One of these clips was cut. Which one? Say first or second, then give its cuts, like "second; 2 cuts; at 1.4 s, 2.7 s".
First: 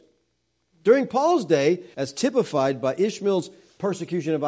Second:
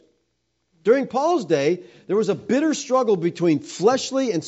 first; 1 cut; at 1.9 s